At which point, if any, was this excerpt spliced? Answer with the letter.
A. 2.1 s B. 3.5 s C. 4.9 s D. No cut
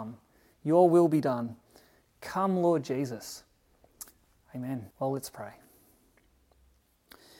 C